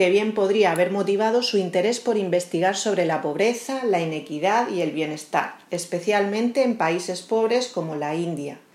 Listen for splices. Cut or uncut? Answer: uncut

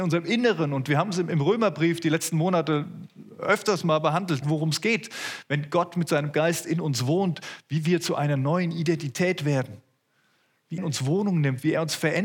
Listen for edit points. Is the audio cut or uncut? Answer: cut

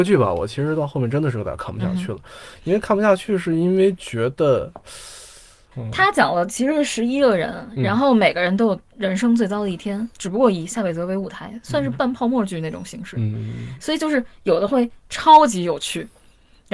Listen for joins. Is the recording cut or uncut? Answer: cut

